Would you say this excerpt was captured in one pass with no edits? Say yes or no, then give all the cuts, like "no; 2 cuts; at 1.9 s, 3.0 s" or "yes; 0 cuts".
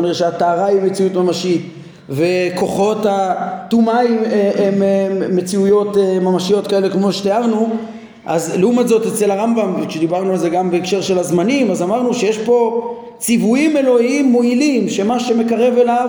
yes; 0 cuts